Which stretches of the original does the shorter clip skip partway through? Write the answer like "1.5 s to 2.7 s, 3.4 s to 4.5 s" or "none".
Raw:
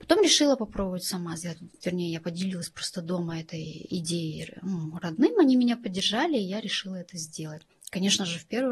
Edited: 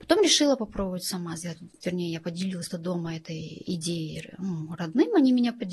2.7 s to 2.9 s